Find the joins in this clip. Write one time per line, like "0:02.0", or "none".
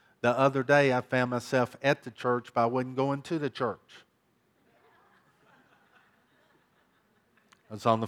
none